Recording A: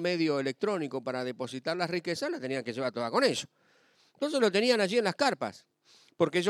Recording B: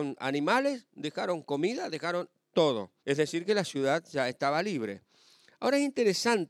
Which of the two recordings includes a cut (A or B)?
B